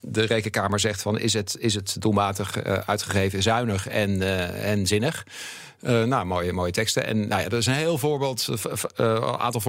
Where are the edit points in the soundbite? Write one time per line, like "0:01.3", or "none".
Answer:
none